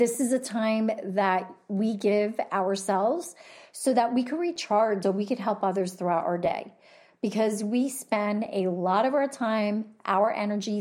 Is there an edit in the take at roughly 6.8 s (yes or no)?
no